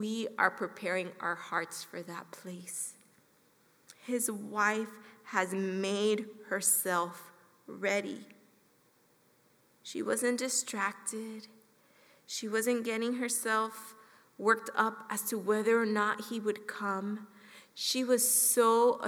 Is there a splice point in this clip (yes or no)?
no